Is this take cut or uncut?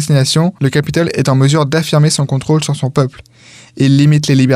uncut